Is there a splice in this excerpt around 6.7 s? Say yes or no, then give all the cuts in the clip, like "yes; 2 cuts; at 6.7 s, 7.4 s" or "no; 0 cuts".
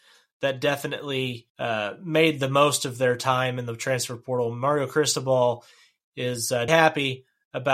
yes; 2 cuts; at 1.5 s, 6.7 s